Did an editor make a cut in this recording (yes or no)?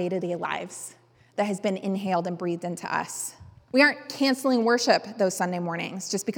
yes